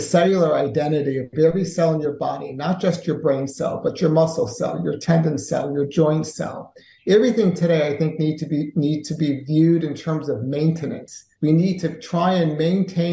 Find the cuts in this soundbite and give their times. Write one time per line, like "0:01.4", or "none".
0:11.3